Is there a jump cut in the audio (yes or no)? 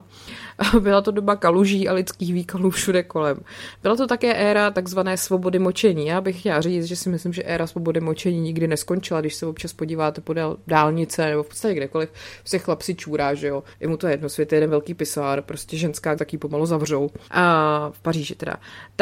yes